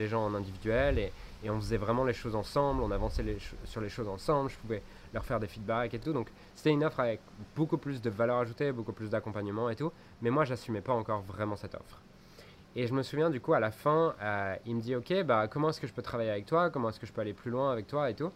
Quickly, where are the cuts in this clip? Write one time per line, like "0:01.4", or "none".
none